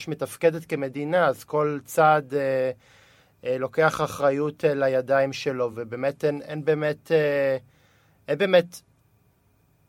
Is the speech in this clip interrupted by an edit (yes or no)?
no